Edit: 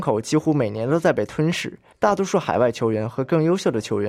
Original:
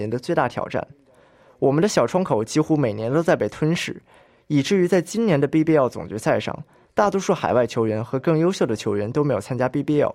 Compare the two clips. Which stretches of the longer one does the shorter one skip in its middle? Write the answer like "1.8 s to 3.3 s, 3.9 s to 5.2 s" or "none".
4.2 s to 6.9 s